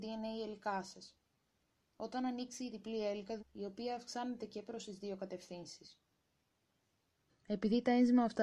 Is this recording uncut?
no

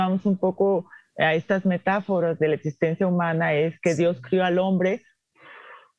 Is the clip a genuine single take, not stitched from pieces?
yes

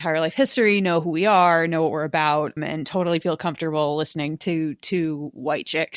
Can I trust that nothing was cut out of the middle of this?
no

